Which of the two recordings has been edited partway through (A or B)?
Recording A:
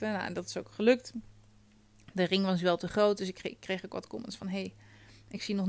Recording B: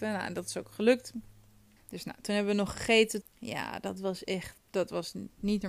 B